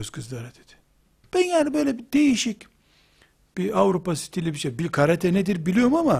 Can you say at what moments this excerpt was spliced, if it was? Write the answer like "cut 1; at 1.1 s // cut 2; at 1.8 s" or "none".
cut 1; at 1.2 s